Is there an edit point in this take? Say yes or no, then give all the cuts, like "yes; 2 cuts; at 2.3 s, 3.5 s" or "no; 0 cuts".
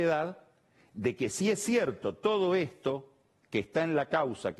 no; 0 cuts